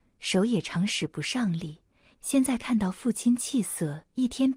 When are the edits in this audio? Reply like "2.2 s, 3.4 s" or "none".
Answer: 2.1 s